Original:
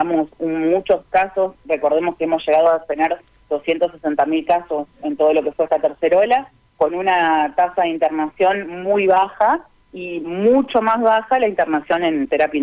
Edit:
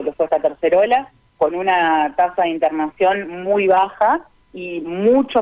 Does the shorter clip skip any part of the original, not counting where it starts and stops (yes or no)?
no